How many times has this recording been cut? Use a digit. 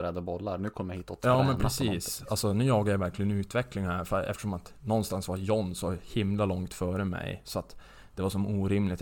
0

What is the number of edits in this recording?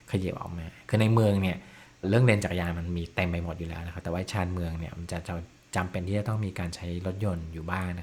1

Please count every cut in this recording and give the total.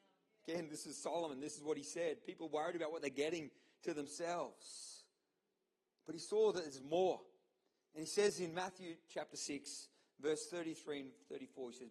0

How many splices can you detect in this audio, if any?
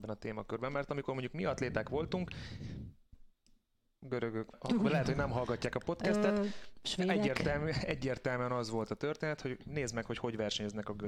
1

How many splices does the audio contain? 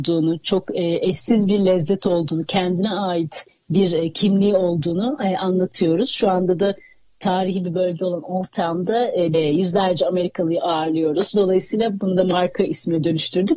2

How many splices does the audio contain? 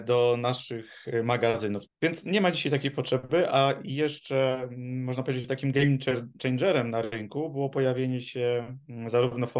1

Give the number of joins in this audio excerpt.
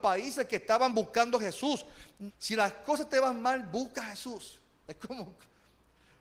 1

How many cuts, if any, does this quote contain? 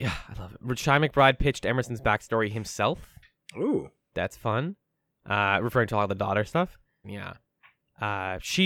1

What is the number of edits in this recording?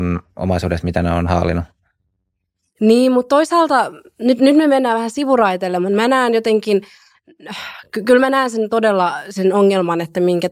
0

